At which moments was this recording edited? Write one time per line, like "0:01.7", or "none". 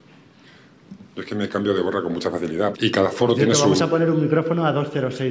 0:02.7